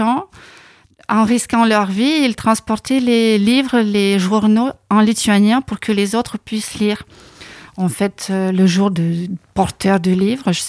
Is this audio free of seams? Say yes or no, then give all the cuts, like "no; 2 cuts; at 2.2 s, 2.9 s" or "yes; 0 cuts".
no; 1 cut; at 7.7 s